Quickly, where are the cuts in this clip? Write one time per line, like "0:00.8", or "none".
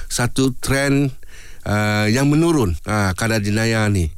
0:02.8